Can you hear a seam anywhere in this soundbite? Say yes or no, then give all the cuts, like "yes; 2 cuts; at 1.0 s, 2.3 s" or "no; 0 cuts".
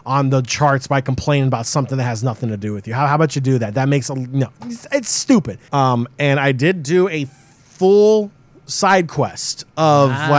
yes; 1 cut; at 5.7 s